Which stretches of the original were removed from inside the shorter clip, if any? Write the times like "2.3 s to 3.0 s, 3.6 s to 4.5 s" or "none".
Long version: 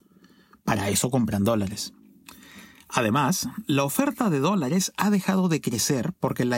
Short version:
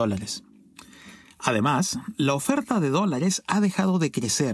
none